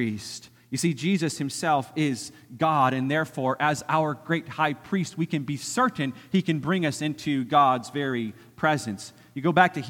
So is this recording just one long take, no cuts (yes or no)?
yes